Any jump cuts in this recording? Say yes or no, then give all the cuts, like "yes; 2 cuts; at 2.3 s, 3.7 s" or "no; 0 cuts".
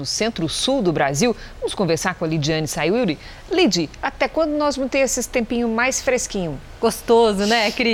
no; 0 cuts